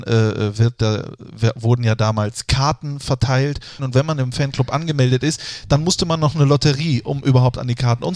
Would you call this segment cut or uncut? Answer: cut